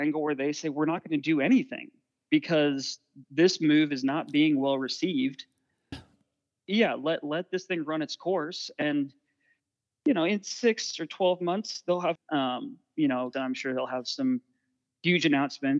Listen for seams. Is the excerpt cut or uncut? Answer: cut